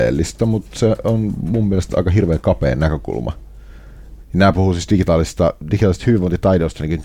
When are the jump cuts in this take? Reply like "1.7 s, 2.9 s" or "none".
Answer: 4.2 s

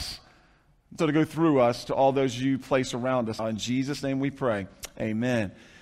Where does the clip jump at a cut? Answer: 1.0 s, 3.4 s

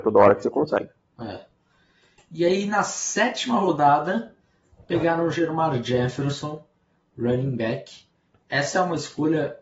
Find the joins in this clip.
none

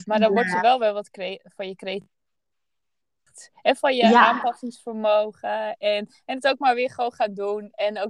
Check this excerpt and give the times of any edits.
none

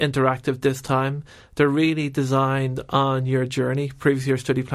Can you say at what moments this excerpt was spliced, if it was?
none

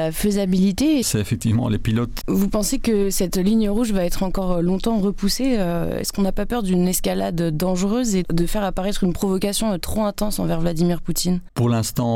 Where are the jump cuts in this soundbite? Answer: 1.0 s, 2.2 s

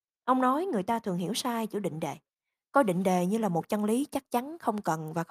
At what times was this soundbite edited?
none

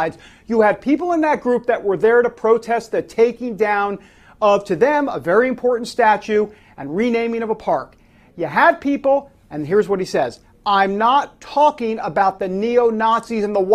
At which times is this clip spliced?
none

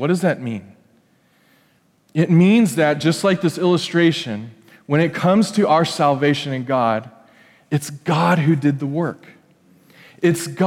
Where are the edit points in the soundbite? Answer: none

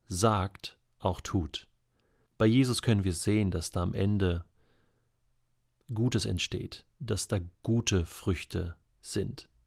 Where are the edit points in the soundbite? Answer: 2.3 s, 6.9 s

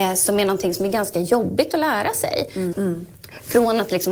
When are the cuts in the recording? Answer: 2.7 s

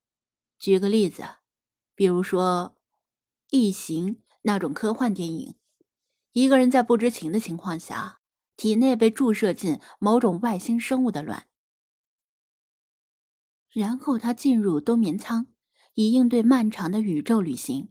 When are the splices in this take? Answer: none

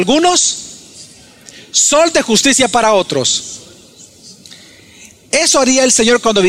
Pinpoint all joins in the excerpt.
none

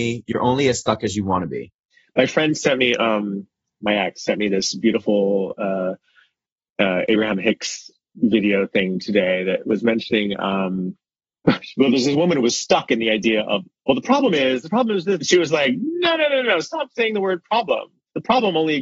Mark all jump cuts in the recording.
15.2 s

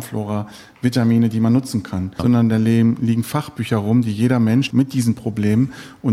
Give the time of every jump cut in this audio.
2.2 s, 4.7 s

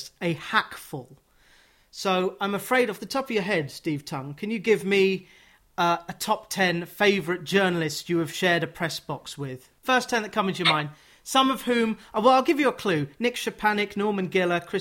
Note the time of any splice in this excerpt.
none

